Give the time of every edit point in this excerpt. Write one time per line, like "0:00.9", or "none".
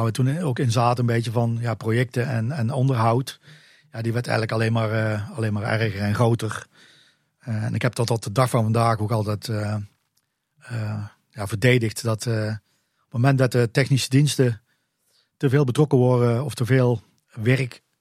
none